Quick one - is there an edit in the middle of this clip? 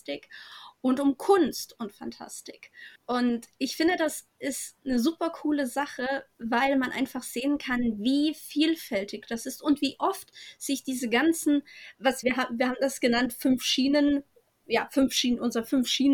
yes; 3 cuts; at 3.0 s, 12.2 s, 14.6 s

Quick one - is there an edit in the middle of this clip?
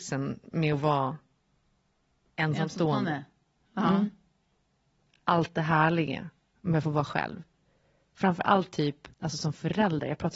yes; 1 cut; at 9.1 s

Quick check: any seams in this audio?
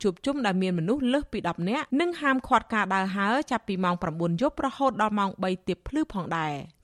yes; 1 cut; at 1.9 s

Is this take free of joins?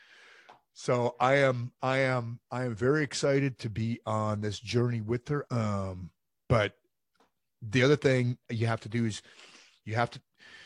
no; 2 cuts; at 5.4 s, 8.4 s

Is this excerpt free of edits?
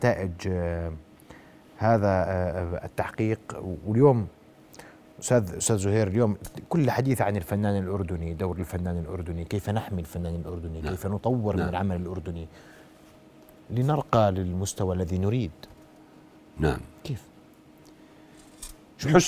yes; 0 cuts

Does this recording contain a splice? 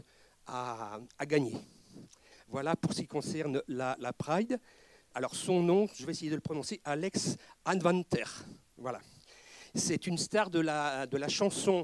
yes; 2 cuts; at 2.3 s, 5.1 s

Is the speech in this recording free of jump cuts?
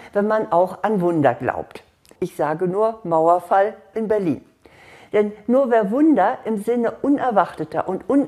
no; 1 cut; at 2.2 s

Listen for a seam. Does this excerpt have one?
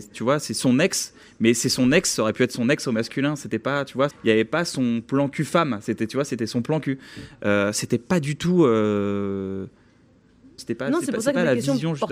yes; 2 cuts; at 4.1 s, 10.6 s

